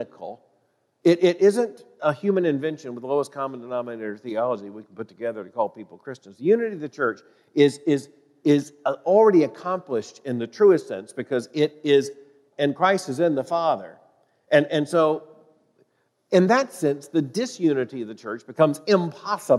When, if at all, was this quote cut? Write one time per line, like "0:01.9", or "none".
0:12.5